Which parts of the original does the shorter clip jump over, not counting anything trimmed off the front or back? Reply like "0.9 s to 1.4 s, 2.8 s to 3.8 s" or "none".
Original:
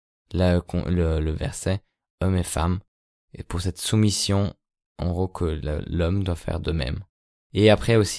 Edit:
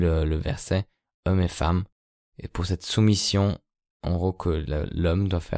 none